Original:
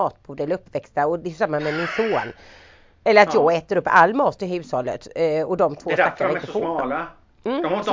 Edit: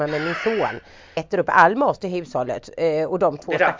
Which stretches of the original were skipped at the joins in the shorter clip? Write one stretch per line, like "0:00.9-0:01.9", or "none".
0:02.7-0:03.5